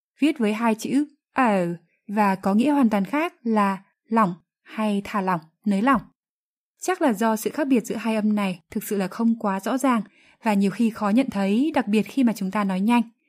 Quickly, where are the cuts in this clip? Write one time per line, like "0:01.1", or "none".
0:06.7